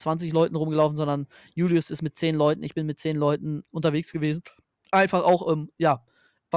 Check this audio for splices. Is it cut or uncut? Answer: cut